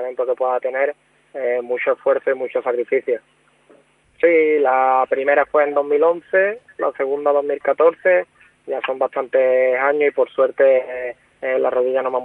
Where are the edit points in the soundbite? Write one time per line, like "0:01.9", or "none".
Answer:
0:04.0